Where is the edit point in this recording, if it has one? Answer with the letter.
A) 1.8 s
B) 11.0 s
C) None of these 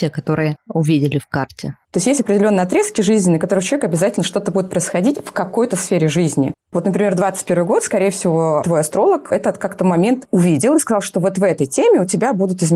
A